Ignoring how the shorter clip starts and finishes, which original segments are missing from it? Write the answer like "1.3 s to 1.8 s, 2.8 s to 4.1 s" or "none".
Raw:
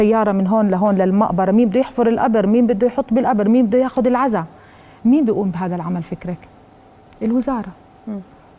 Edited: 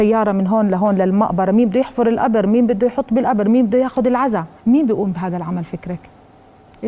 4.6 s to 4.9 s